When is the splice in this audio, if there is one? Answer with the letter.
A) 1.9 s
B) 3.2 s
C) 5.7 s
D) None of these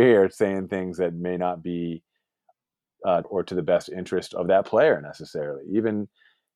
B